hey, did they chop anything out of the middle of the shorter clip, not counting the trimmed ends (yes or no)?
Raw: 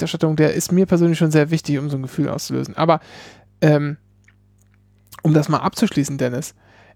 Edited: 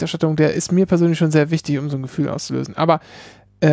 no